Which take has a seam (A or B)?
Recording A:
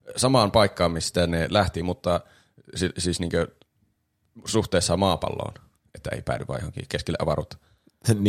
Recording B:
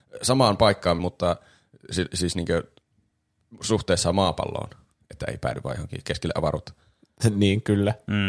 B